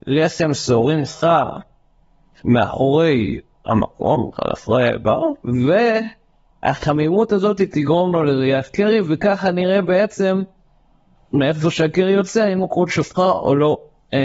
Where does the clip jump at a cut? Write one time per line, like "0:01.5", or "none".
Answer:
none

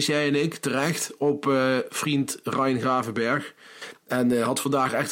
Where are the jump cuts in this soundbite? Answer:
none

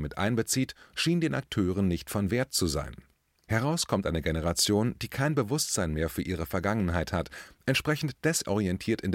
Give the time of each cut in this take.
0:03.4

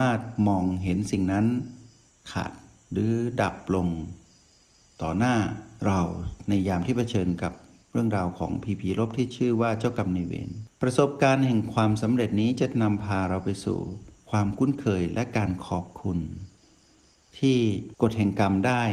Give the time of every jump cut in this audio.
0:10.7

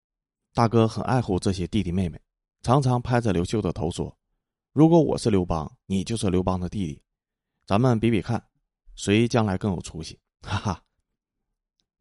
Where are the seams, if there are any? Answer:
none

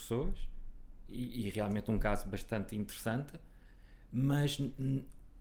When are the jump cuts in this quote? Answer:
none

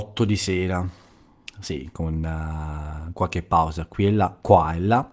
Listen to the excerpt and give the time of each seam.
none

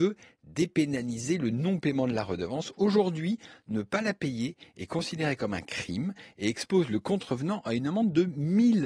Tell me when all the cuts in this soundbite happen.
none

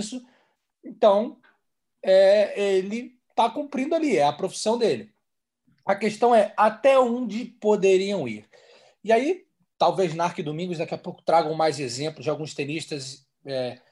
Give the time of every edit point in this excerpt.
none

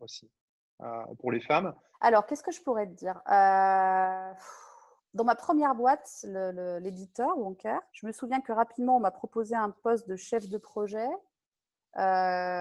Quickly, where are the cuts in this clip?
0:01.9
0:07.9

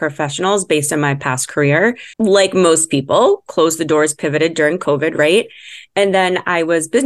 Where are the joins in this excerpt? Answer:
0:02.1

